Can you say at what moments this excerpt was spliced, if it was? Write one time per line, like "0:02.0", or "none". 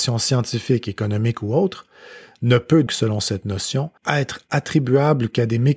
0:02.9
0:04.0